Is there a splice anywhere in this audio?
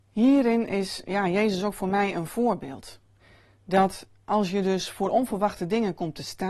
no; 0 cuts

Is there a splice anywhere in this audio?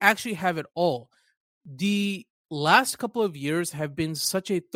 no; 0 cuts

